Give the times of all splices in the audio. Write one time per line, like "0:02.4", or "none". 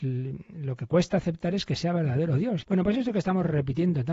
0:02.6